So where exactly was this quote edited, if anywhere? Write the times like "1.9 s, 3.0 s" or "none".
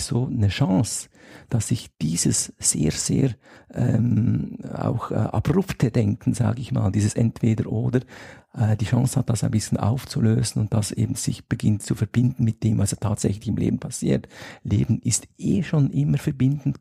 none